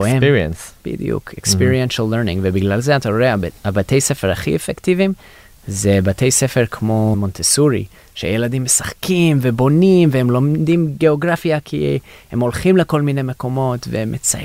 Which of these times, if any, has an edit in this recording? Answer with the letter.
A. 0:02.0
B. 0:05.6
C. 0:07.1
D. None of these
C